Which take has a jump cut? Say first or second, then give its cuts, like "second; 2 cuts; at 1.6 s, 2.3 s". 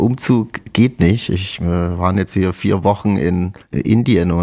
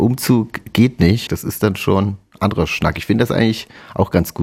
second; 1 cut; at 1.3 s